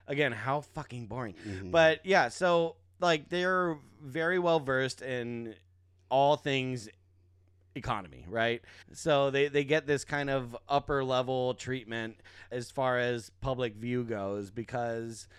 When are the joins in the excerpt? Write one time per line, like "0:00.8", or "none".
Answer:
0:08.8
0:12.5